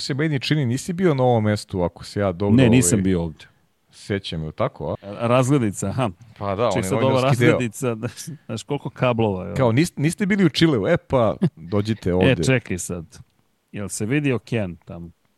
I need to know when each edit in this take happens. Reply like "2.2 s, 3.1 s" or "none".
5.0 s

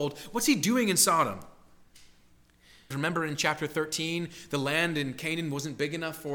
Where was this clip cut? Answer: 2.9 s

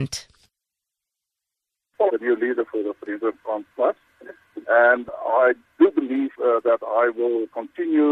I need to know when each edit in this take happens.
2.1 s

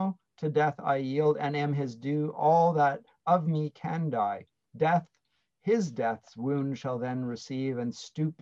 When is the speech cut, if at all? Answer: 4.7 s

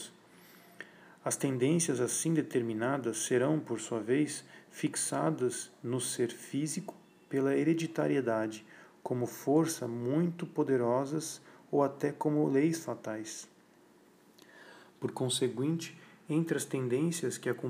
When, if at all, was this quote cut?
none

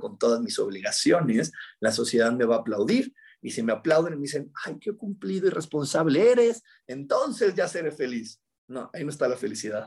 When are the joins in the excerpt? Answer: none

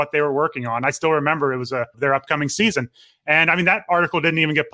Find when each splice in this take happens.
1.9 s

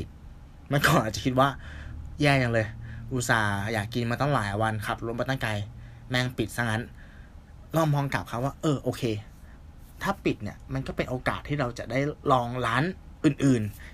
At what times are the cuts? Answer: none

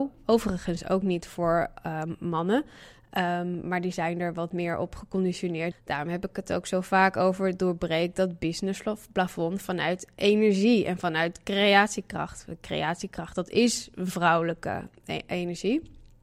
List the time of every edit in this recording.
5.7 s

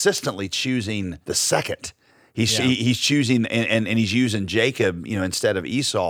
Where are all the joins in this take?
1.2 s

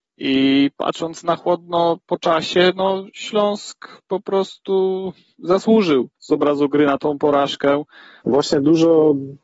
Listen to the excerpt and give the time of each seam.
6.2 s, 8.2 s

